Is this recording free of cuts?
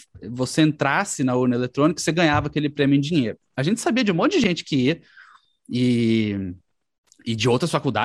yes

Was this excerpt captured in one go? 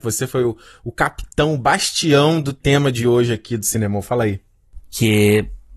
no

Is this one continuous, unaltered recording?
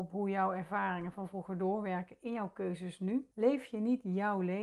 no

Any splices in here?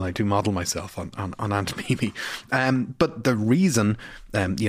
no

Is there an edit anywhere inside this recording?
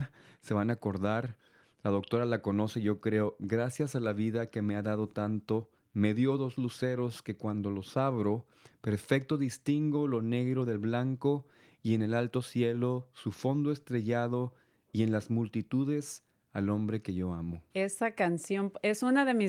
yes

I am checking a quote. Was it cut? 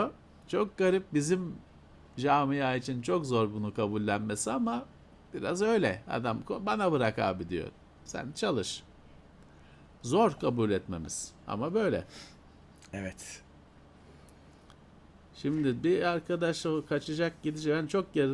no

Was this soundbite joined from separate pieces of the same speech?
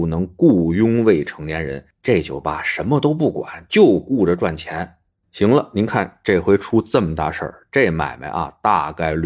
no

